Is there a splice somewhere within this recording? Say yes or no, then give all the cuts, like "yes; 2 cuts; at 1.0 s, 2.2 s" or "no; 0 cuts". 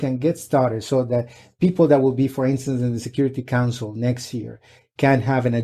no; 0 cuts